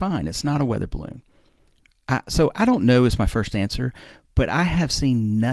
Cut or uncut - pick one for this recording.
uncut